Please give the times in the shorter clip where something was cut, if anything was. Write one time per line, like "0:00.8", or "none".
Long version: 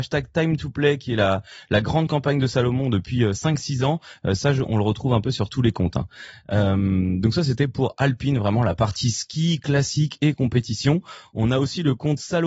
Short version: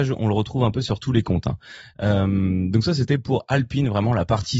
none